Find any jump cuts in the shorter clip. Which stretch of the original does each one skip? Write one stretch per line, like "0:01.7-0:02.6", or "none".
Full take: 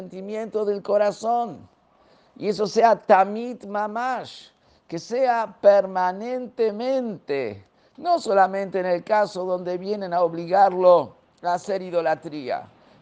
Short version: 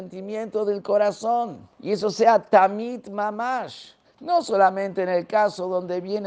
0:01.7-0:02.3
0:04.6-0:07.8

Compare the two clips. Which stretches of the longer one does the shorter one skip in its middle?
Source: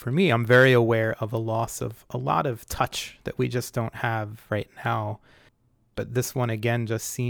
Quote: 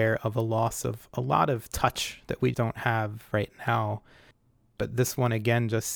0:03.5-0:03.7

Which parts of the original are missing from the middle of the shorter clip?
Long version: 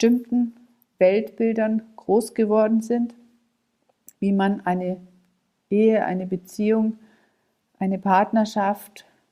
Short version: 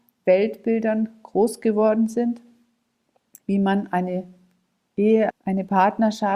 0:06.0-0:07.6

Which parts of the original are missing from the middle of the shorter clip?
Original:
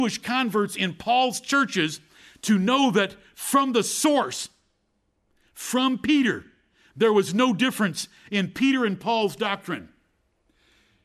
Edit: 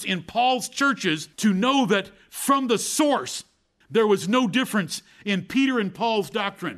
0:02.0-0:02.4
0:04.9-0:06.9

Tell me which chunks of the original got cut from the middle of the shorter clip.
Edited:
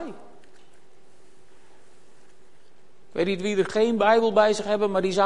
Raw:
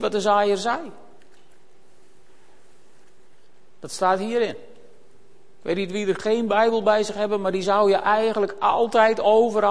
0:03.8-0:05.5

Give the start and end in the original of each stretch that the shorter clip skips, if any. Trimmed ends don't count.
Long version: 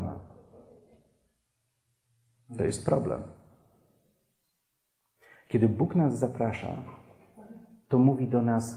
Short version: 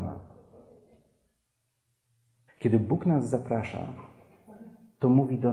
0:02.5-0:05.4

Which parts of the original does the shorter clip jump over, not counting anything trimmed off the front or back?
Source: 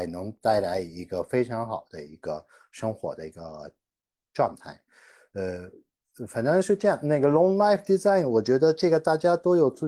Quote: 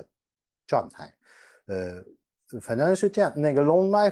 none

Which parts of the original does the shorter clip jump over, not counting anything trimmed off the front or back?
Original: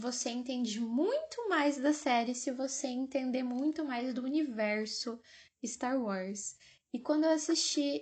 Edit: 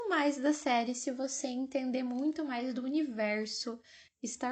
none

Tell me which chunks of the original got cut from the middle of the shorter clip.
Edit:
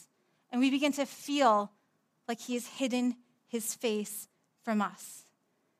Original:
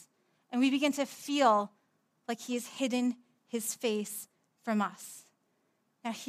none

